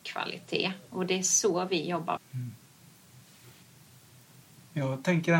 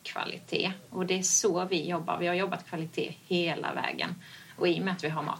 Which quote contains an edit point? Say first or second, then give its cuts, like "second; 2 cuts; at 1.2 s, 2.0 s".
first; 1 cut; at 2.2 s